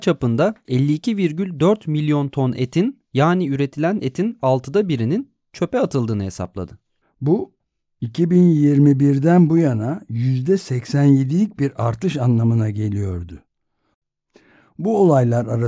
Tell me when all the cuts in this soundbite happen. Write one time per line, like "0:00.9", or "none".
0:07.0